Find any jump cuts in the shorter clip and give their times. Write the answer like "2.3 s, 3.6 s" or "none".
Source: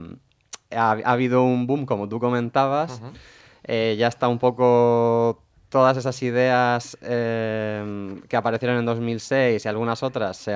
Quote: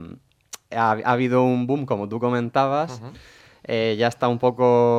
none